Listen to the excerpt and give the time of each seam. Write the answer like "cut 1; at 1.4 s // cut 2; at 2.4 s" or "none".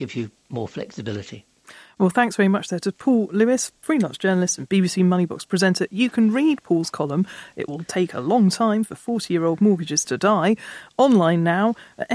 none